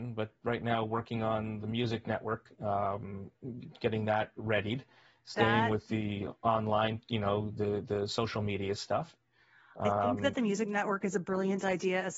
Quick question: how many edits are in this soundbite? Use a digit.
0